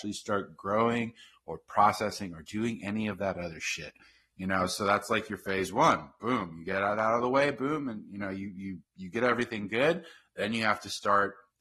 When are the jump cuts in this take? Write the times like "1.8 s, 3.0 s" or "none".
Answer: none